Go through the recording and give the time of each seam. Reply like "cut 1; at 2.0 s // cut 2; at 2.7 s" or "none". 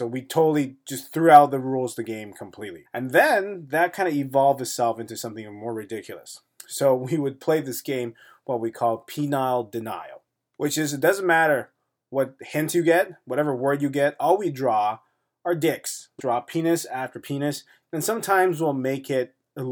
cut 1; at 2.8 s // cut 2; at 16.2 s // cut 3; at 17.8 s